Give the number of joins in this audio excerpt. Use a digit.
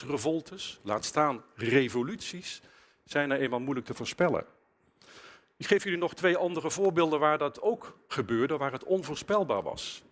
1